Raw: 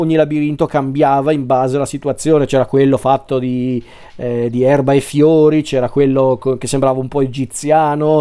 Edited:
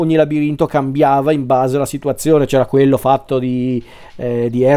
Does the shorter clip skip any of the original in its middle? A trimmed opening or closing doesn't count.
no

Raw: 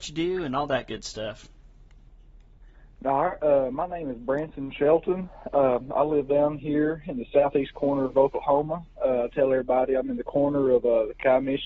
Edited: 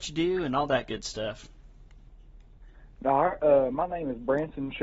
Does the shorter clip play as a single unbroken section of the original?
yes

